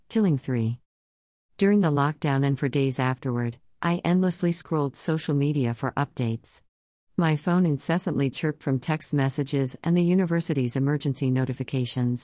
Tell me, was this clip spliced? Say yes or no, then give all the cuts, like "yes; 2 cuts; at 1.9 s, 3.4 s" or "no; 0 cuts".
no; 0 cuts